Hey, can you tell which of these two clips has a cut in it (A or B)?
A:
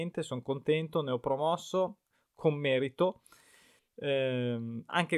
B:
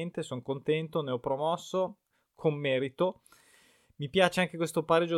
A